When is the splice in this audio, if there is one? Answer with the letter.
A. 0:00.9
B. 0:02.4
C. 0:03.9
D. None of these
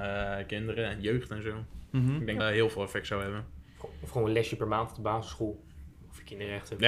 B